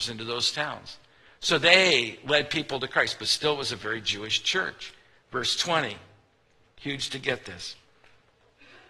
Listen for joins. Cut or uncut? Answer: uncut